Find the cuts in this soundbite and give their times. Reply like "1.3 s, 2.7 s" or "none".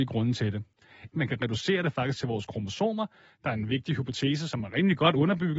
1.1 s